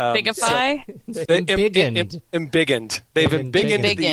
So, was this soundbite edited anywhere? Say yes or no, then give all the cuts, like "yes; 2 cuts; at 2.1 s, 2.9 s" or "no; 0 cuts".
yes; 1 cut; at 1.3 s